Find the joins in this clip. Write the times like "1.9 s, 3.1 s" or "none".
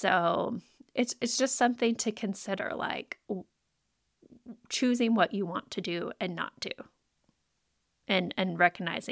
none